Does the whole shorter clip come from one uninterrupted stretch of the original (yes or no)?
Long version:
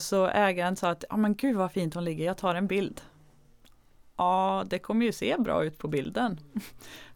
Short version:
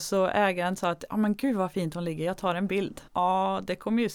no